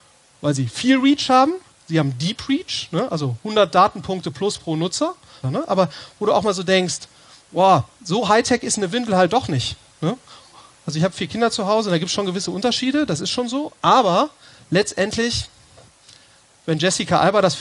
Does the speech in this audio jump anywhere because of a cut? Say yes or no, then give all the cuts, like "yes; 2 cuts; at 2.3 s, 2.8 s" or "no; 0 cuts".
yes; 1 cut; at 5.4 s